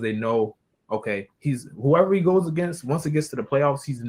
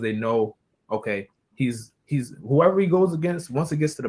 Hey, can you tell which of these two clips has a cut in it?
first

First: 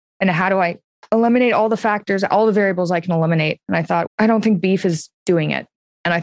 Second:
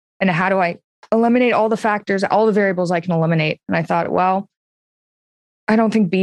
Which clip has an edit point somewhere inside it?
first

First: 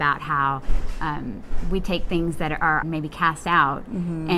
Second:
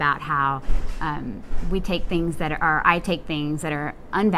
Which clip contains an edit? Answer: first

